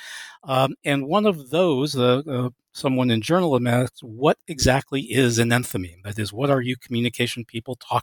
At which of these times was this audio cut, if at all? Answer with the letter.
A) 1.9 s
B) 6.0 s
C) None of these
C